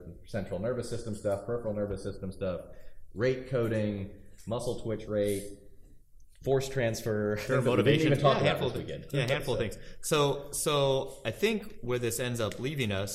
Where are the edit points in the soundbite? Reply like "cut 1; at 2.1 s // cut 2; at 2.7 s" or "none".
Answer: cut 1; at 7.5 s